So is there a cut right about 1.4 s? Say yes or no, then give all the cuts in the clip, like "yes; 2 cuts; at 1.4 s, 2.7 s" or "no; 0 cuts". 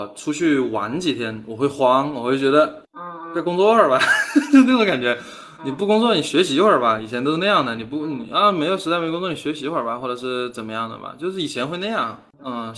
no; 0 cuts